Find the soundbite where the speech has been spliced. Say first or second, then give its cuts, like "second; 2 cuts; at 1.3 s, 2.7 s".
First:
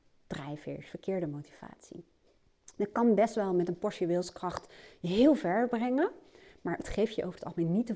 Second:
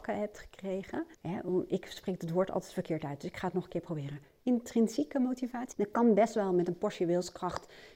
second; 3 cuts; at 1.1 s, 4.4 s, 5.7 s